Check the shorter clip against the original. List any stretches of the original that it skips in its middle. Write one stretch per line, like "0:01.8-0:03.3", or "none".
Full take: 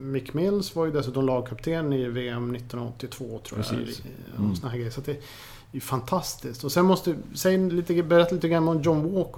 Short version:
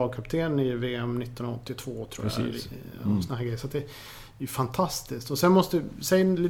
none

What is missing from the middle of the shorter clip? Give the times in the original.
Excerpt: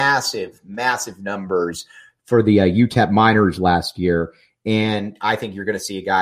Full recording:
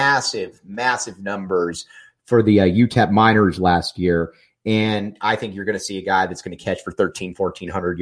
none

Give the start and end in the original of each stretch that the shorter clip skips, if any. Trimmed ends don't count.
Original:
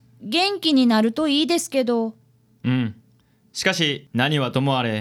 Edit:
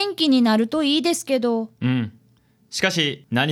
0:02.2-0:02.6

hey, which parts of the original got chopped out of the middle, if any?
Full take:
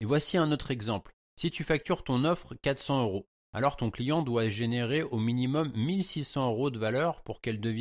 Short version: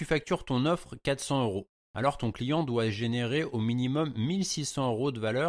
none

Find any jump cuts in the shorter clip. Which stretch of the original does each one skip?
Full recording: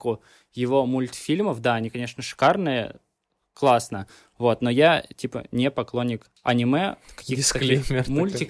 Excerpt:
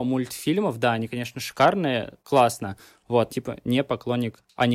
0:03.0-0:03.5
0:04.6-0:05.2

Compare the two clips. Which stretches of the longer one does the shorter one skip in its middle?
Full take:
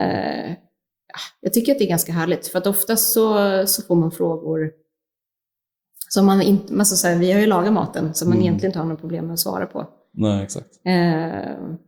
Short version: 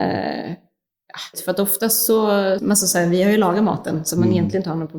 0:01.3-0:02.4
0:03.7-0:06.7

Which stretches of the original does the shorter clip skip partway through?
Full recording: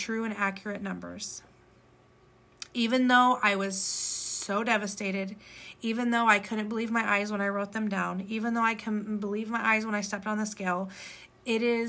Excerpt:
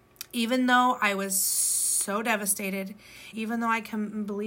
0:05.7-0:08.3

